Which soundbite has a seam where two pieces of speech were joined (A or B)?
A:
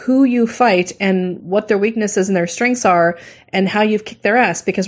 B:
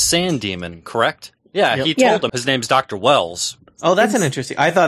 B